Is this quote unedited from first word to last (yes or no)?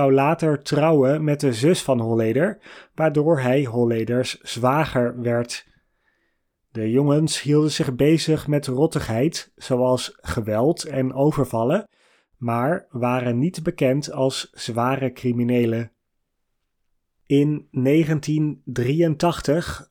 yes